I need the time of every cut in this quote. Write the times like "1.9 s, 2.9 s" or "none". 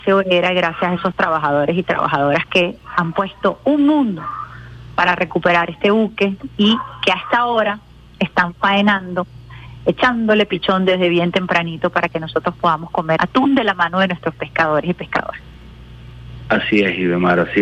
13.2 s

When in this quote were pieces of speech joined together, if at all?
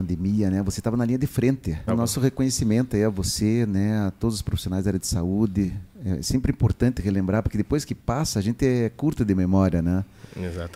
1.9 s

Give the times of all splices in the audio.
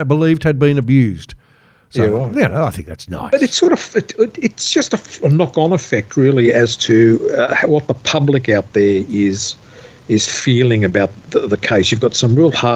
none

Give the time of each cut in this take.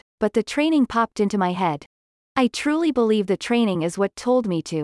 2.2 s

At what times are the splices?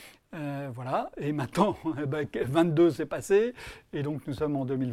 none

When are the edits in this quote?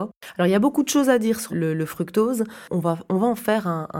1.5 s

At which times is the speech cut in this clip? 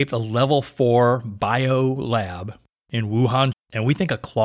3.5 s

